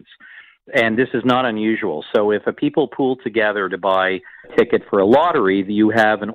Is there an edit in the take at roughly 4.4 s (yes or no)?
yes